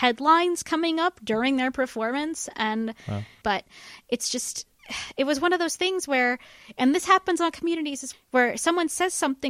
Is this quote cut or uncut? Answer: cut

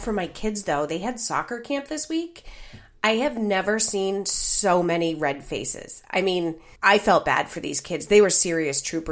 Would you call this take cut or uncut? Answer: cut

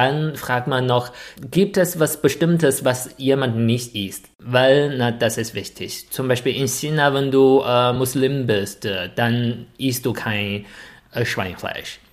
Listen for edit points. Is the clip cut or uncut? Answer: uncut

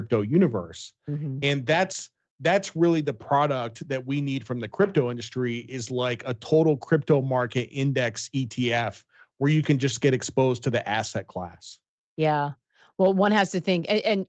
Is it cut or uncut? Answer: cut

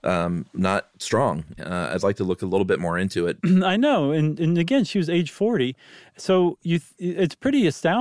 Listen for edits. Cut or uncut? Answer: cut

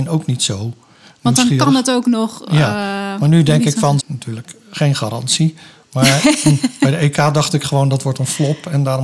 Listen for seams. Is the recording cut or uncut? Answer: cut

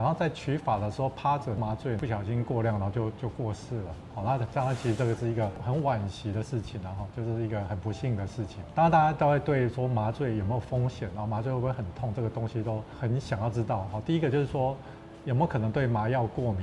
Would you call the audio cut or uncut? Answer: uncut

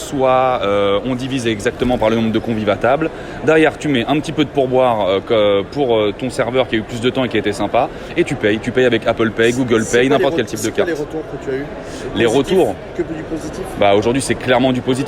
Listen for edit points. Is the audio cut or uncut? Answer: uncut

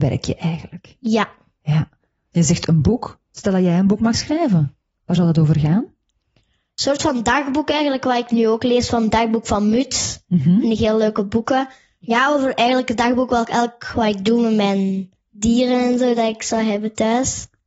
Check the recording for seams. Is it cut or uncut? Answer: uncut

